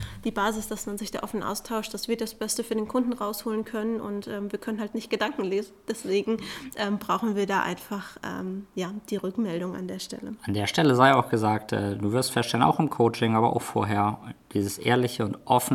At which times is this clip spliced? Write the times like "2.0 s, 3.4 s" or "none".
none

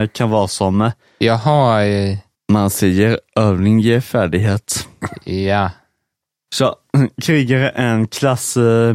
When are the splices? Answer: 2.3 s, 6.5 s

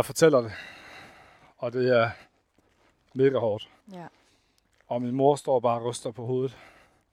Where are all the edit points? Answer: 3.8 s

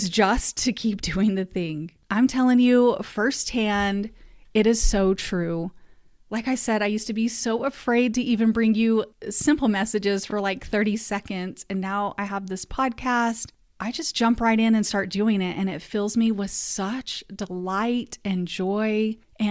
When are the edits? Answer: none

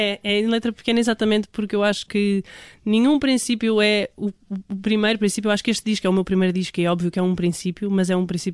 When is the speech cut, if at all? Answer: none

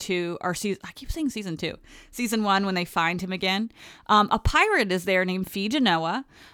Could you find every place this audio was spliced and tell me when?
none

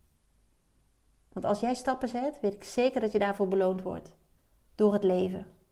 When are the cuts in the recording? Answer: 1.3 s

